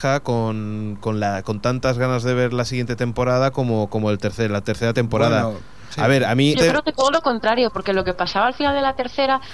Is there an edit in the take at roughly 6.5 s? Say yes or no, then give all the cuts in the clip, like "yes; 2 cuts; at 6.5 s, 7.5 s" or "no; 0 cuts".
yes; 1 cut; at 6.5 s